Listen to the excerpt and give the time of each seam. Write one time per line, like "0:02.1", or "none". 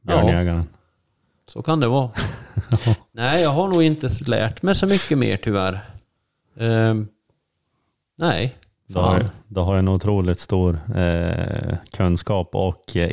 none